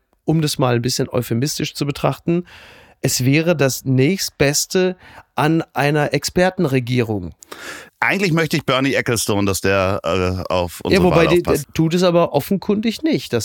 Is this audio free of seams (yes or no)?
no